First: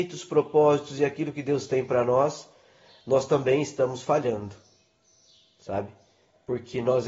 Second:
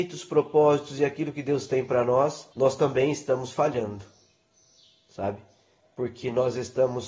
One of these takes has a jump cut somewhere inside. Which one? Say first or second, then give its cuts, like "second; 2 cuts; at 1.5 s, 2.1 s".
second; 1 cut; at 2.5 s